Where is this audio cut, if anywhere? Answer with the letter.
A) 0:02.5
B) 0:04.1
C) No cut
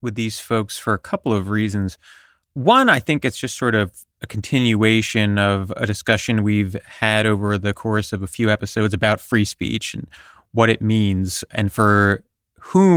B